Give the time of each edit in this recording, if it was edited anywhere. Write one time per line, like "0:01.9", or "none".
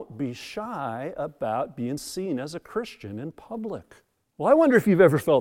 0:04.3